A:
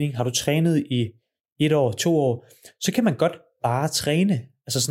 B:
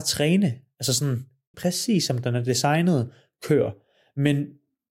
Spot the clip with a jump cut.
B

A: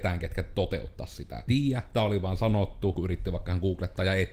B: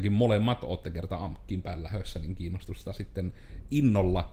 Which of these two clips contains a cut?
A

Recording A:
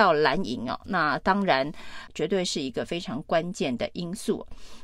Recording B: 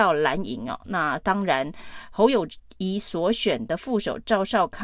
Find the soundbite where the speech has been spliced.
A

